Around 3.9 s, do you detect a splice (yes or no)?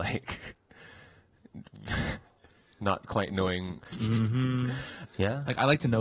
yes